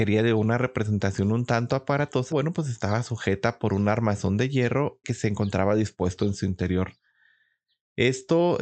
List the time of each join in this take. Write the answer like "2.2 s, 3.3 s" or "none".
2.3 s, 5.0 s